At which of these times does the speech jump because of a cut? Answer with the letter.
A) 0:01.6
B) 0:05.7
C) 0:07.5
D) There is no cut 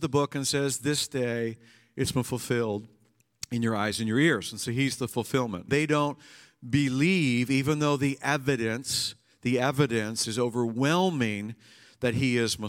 B